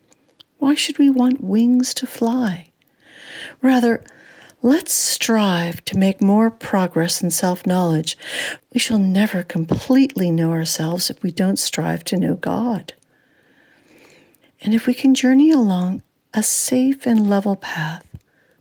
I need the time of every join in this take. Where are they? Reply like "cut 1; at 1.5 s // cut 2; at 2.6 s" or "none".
cut 1; at 8.6 s // cut 2; at 14.4 s